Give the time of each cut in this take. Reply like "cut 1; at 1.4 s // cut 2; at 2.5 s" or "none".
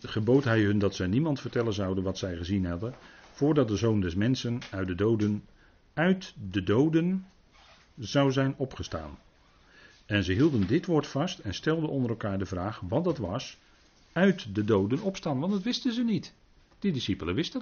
none